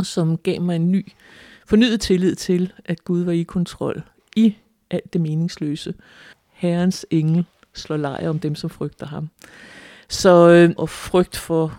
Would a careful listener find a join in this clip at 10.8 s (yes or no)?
yes